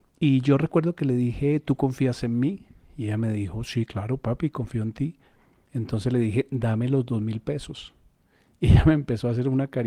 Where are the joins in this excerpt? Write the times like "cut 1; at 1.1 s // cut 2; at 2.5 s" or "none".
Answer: none

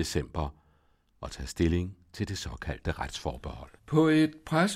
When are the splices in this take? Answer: cut 1; at 3.8 s

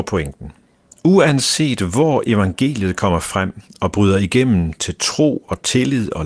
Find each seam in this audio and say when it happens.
none

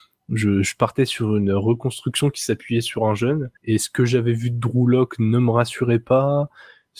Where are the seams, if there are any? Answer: cut 1; at 3.6 s

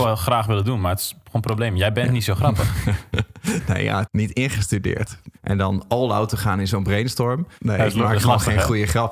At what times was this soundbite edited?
cut 1; at 4.1 s // cut 2; at 5.4 s // cut 3; at 7.6 s

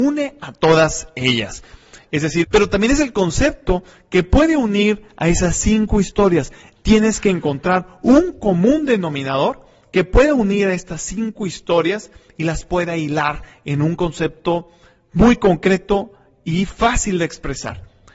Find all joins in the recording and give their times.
cut 1; at 2.4 s

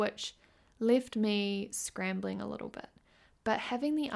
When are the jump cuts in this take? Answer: none

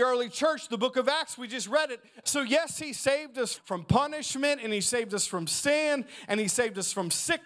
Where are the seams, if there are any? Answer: cut 1; at 2.2 s // cut 2; at 3.6 s

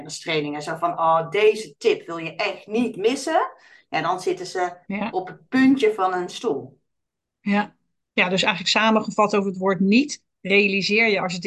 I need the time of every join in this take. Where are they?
none

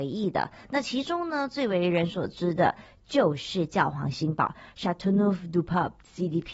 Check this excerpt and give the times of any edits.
none

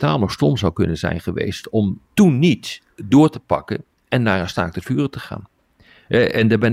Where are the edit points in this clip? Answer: cut 1; at 2.0 s

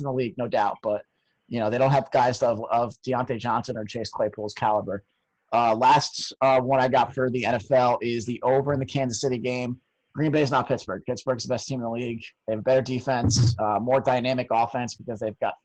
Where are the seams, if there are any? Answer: cut 1; at 10.1 s

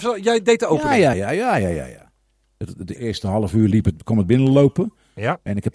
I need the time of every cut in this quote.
cut 1; at 1.1 s // cut 2; at 3.0 s

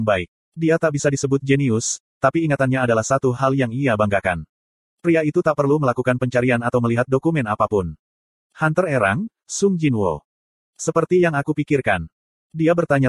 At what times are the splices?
none

